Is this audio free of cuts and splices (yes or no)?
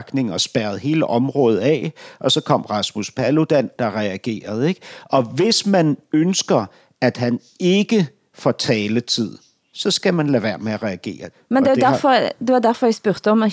no